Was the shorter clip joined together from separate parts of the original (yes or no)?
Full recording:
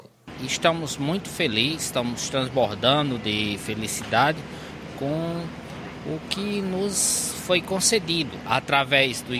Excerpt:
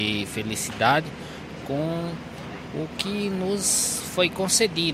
no